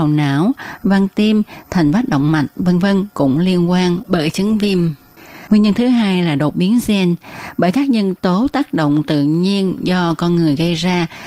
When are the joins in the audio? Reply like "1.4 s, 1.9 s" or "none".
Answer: none

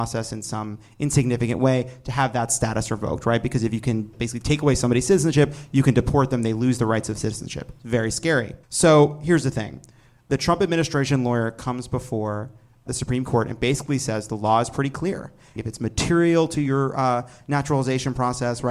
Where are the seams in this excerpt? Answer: 8.6 s, 15.6 s

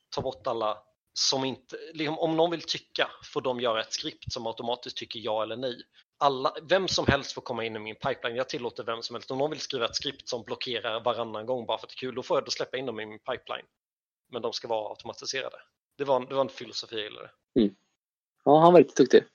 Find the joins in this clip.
6.0 s

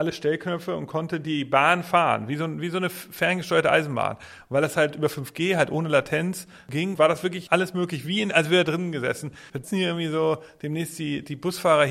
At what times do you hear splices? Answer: 9.5 s

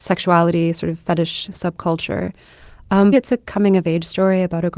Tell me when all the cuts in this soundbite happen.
3.1 s

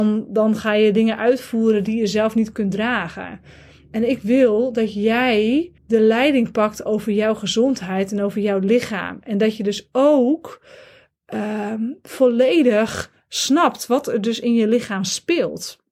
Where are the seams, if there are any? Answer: 5.8 s

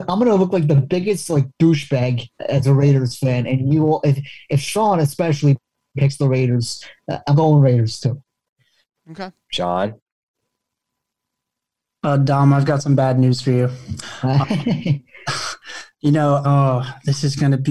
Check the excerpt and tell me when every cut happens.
14.0 s, 16.4 s

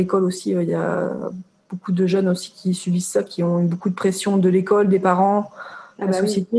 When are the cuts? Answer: none

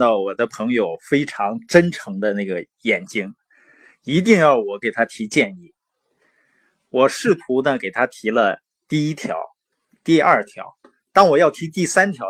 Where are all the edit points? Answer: none

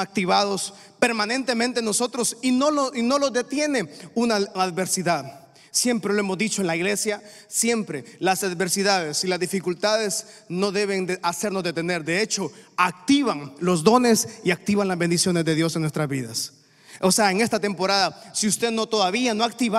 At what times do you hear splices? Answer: none

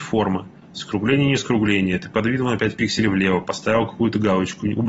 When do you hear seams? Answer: 3.4 s

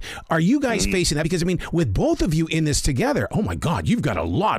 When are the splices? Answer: none

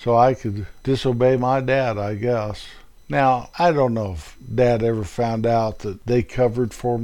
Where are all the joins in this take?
3.0 s

